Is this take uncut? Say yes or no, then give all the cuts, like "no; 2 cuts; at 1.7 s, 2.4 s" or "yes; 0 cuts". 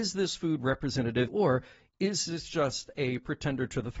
no; 1 cut; at 1.3 s